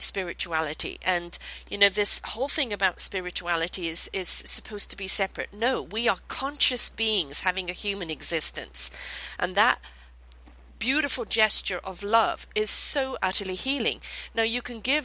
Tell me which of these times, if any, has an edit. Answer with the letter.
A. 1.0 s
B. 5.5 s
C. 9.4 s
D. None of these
C